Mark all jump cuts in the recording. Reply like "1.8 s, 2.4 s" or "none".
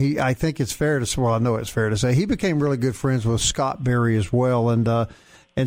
none